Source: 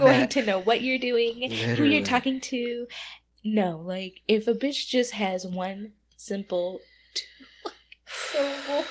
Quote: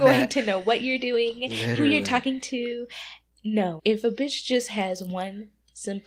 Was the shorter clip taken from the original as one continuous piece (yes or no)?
no